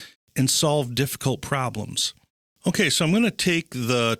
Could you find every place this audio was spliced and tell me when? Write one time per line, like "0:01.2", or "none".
0:02.5

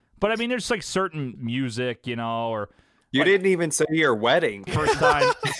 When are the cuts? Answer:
0:01.4
0:04.7

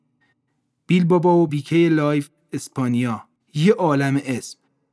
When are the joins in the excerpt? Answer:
0:01.5
0:03.3

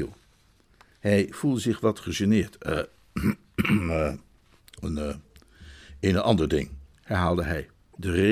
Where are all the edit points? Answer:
none

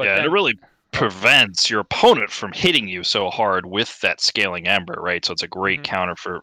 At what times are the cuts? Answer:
none

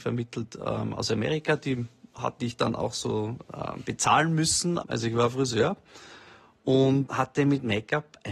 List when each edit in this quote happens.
0:04.8
0:07.1

